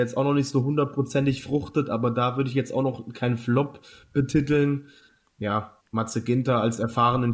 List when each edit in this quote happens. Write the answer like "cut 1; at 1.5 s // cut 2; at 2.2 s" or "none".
cut 1; at 5.8 s